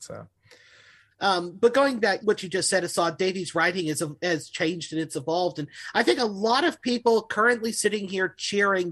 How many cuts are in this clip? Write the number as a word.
two